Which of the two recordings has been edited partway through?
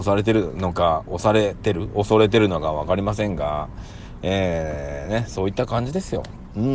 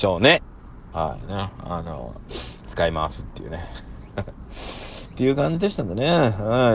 second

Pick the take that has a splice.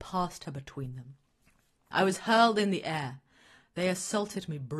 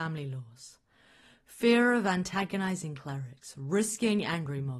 first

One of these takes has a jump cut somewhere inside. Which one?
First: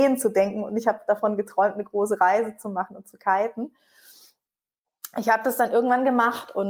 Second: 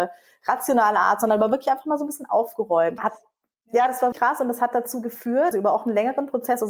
second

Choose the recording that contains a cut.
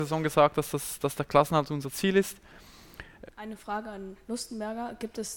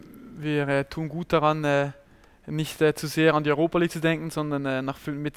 first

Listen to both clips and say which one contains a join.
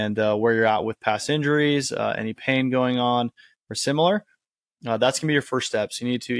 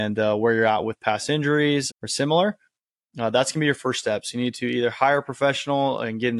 second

